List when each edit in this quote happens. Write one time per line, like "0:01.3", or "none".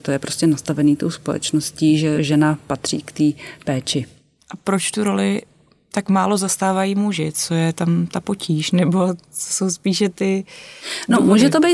none